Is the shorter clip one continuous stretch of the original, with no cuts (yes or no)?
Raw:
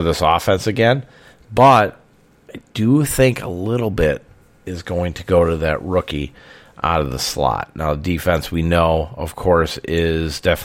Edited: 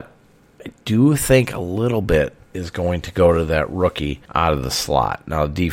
no